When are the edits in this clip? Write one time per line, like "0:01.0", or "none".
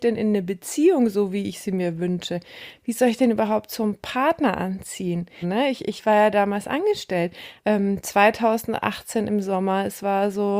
0:05.4
0:07.6

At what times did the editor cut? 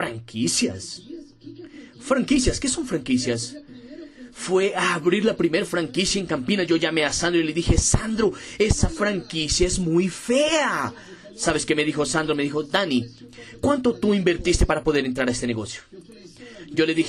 none

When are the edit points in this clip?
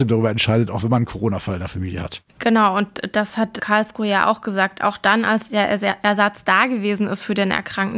none

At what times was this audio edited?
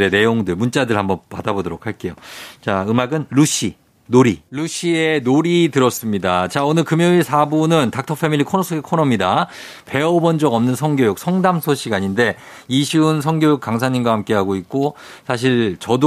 0:04.5

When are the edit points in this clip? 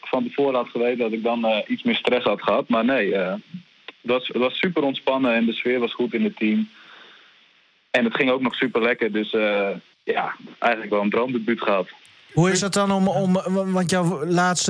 none

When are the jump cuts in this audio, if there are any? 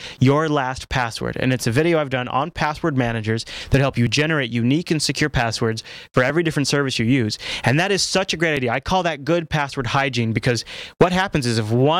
none

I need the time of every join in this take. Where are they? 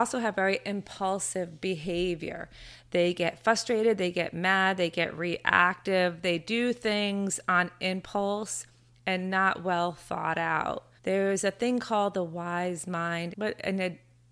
0:11.0
0:13.3

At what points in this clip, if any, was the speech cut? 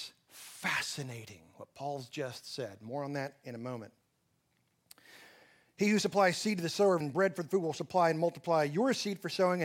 0:07.0

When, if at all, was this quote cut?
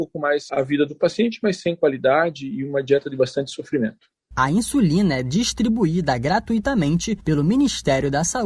none

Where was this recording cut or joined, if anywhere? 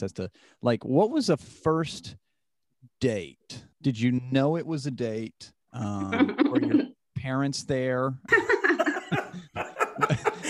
0:03.7
0:05.6
0:08.3

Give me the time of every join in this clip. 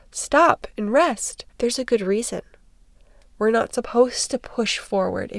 0:01.5

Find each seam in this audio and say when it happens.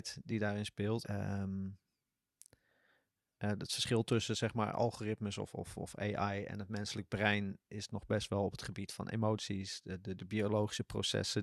0:01.0

